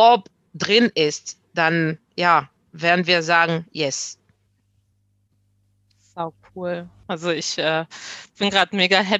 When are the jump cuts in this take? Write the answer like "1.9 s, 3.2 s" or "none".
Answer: none